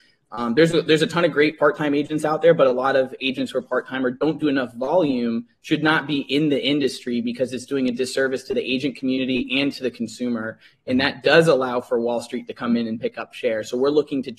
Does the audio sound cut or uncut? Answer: uncut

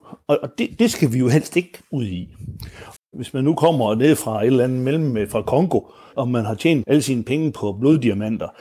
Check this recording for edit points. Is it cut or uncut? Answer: cut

